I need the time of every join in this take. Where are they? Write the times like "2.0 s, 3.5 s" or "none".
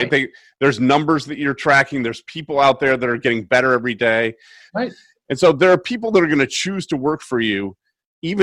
4.7 s